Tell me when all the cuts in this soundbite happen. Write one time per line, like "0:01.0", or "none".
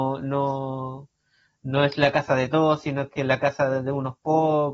none